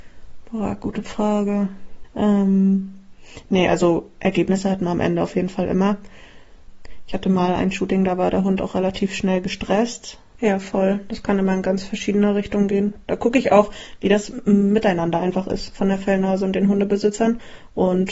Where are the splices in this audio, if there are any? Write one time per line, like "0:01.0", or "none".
0:10.4